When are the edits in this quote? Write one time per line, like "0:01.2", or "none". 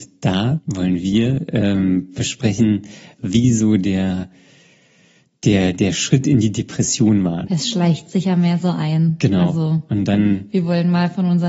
0:07.5